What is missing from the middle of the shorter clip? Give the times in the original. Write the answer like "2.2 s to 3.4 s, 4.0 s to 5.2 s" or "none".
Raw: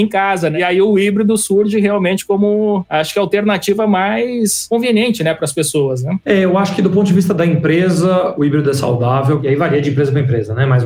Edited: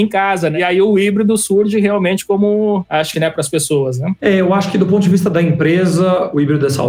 3.1 s to 5.2 s